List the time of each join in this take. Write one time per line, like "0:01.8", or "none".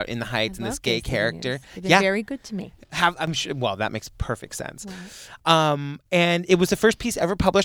none